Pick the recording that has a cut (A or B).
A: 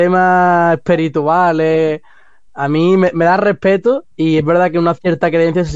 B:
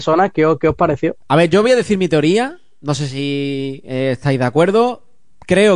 A